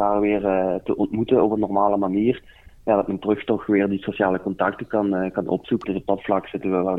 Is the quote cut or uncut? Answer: cut